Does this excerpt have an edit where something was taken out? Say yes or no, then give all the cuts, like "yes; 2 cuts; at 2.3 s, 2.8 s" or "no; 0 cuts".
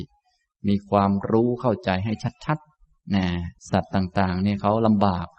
yes; 1 cut; at 3.6 s